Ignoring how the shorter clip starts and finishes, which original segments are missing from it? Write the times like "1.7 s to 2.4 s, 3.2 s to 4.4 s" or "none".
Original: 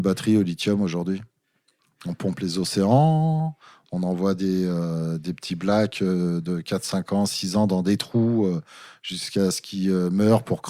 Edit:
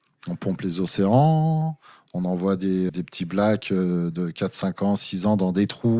4.7 s to 5.2 s

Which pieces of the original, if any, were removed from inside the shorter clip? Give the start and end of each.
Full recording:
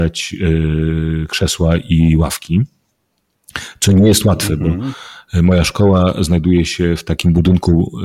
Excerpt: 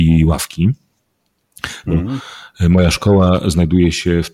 3.8 s to 4.6 s

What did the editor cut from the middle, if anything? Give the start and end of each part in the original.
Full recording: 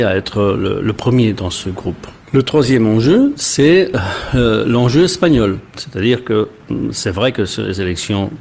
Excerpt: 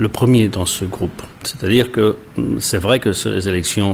2.2 s to 5.7 s

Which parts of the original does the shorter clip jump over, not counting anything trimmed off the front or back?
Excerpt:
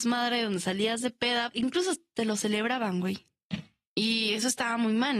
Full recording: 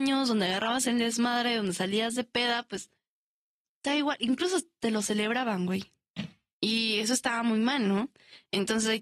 2.6 s to 4.2 s

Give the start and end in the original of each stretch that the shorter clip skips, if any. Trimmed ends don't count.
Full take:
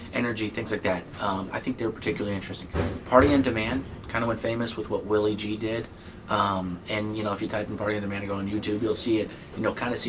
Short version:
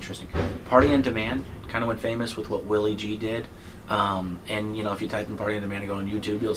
none

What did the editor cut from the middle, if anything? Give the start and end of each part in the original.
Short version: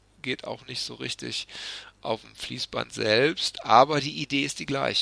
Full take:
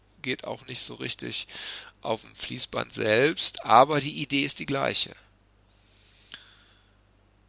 none

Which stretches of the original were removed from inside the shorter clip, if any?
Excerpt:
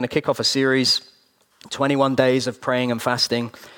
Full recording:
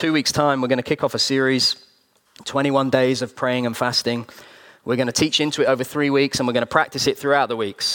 none

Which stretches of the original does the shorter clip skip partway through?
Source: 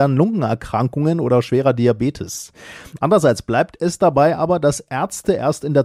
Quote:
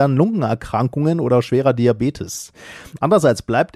none

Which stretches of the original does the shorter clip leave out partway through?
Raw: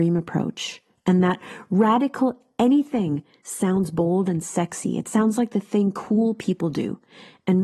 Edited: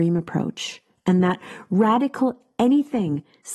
none

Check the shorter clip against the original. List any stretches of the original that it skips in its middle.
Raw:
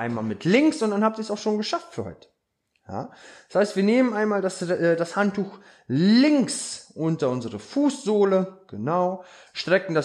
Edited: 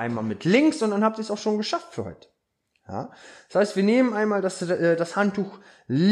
none

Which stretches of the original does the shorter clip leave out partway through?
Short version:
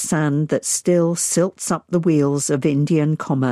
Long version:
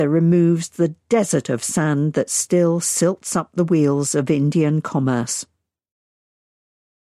none

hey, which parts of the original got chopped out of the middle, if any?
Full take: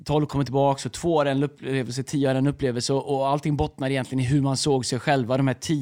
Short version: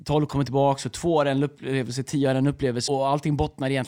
2.9 s to 3.1 s

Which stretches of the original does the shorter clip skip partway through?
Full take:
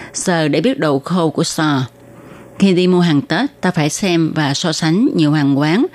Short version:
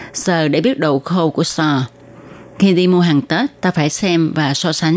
none

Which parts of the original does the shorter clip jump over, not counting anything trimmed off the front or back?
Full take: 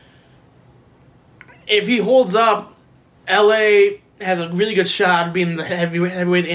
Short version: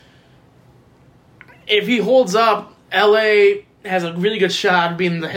2.8 s to 3.2 s

